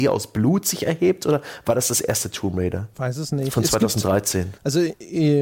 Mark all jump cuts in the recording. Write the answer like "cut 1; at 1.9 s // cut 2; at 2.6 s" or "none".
none